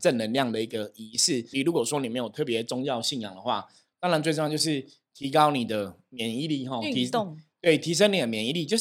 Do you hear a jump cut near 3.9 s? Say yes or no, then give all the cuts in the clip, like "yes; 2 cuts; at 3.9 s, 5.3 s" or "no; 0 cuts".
no; 1 cut; at 1.5 s